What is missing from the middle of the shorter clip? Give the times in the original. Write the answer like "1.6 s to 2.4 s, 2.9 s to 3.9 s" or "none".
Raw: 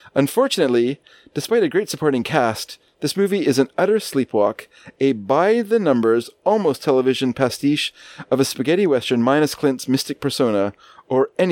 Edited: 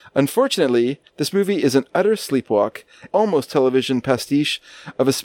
1.1 s to 2.9 s, 4.9 s to 6.4 s